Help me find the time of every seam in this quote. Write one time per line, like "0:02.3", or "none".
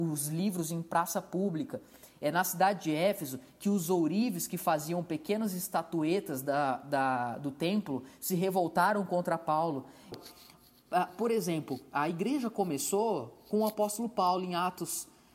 0:10.1